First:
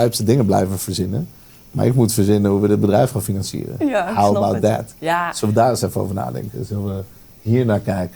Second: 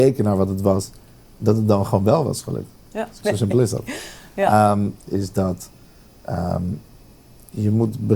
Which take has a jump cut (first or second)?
second